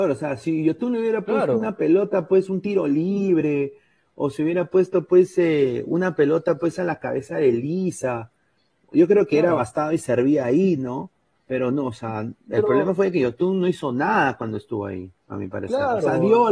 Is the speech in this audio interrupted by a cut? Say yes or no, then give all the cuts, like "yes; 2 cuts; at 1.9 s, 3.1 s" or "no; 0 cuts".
no; 0 cuts